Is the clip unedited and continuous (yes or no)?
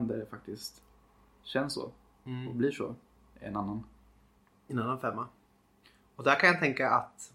yes